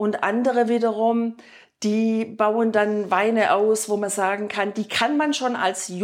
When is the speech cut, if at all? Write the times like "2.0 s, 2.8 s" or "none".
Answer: none